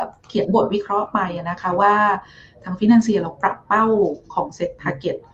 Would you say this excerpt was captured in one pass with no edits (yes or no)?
yes